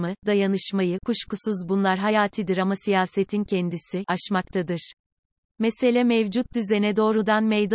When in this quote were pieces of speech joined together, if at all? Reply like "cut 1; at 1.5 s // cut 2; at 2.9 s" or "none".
cut 1; at 4.0 s